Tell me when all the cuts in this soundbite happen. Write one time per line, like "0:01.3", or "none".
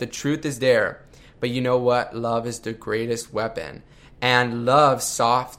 none